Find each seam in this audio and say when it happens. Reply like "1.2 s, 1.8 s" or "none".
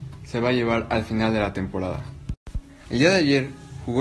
2.8 s